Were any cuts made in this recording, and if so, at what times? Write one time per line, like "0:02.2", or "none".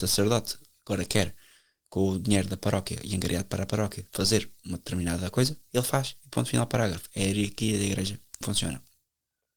0:08.4